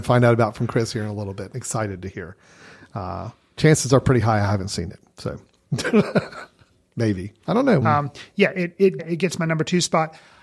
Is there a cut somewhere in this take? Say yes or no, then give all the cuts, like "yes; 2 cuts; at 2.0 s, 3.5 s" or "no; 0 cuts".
yes; 2 cuts; at 7.8 s, 9.0 s